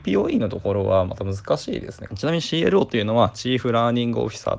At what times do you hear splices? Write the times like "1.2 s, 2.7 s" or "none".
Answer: 2.1 s